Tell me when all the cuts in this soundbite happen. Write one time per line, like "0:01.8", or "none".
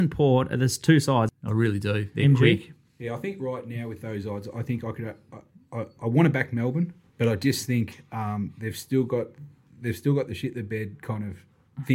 0:01.3